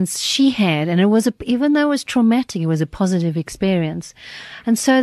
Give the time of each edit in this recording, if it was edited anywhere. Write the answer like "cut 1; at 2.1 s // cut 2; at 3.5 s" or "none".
none

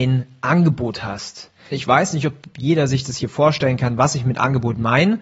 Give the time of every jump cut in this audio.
cut 1; at 1.7 s

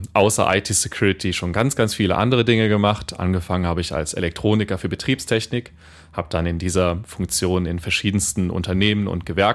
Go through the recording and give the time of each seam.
none

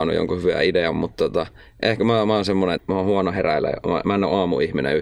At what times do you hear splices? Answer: cut 1; at 2.8 s

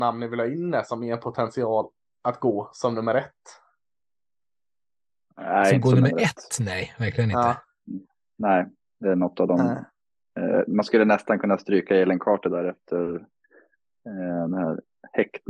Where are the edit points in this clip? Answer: none

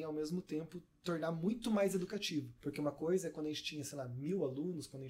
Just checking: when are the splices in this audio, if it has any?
cut 1; at 2.6 s

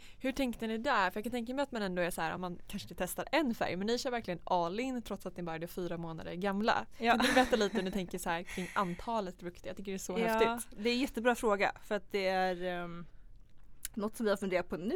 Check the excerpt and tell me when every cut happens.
cut 1; at 2.4 s

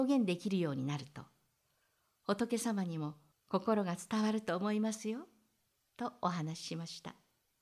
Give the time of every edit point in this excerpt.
cut 1; at 3.3 s

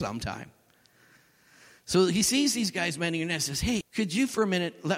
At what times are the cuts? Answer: cut 1; at 3.8 s

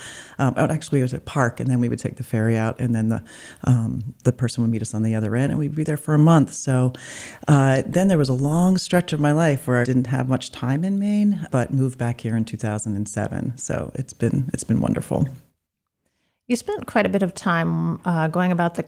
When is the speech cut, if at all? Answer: cut 1; at 9.8 s // cut 2; at 11.5 s

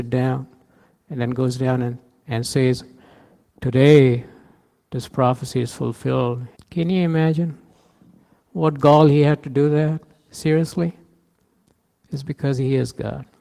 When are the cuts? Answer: cut 1; at 6.6 s

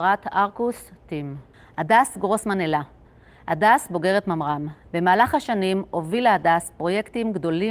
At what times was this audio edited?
cut 1; at 4.9 s

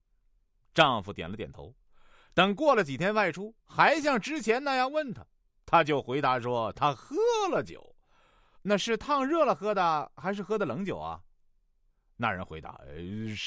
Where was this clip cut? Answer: cut 1; at 3.6 s // cut 2; at 8.5 s

